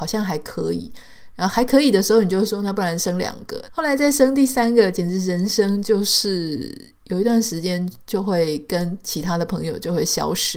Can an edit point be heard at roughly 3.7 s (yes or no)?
yes